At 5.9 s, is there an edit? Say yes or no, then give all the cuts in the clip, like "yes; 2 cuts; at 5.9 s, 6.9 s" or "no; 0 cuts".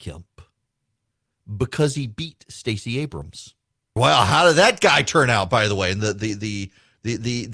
no; 1 cut; at 4.0 s